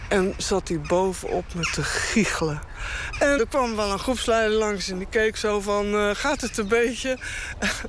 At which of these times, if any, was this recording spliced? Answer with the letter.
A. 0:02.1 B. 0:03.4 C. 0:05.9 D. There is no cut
B